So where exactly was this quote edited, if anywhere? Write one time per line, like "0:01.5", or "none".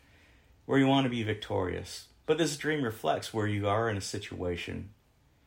0:02.2